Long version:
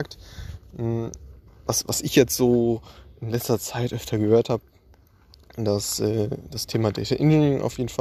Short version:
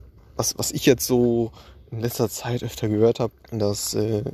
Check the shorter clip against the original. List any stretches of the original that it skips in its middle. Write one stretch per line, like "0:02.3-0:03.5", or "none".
0:04.7-0:05.4